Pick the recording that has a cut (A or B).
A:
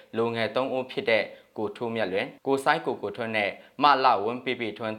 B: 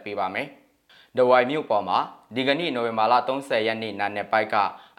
A